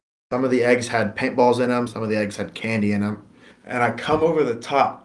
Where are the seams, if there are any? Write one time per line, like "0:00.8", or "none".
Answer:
0:01.9
0:03.5